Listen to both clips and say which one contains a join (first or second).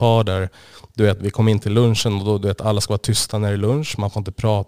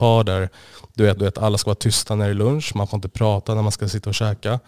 second